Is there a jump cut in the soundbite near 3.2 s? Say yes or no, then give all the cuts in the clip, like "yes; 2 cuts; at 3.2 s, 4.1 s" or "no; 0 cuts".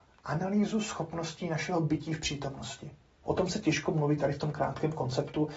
yes; 1 cut; at 3.2 s